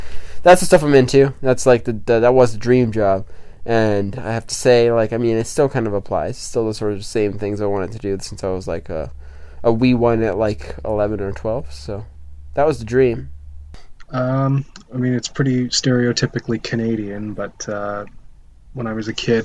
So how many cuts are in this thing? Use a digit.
0